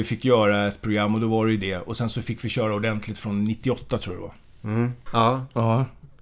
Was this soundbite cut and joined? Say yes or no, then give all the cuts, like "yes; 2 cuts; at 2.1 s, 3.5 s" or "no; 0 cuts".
yes; 1 cut; at 5.1 s